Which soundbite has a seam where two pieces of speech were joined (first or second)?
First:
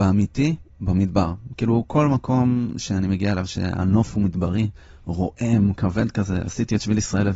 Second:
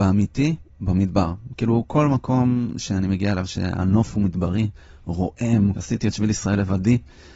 second